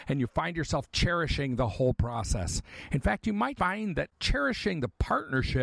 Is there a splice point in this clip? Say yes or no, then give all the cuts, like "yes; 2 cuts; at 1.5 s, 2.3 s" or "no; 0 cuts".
yes; 1 cut; at 3.6 s